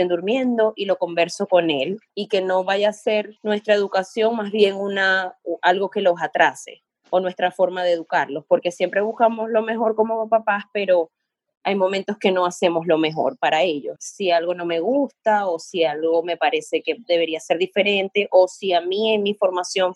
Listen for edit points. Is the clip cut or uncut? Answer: cut